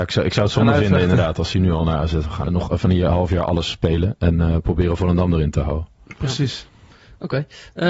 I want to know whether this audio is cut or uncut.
cut